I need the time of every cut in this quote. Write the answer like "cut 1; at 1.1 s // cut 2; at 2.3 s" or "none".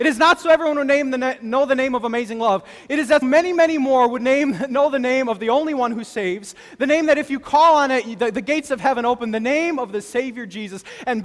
cut 1; at 3.2 s